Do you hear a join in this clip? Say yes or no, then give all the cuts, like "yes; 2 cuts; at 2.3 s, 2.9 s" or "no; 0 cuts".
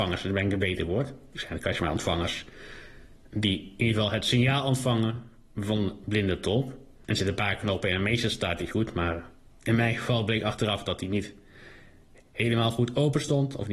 no; 0 cuts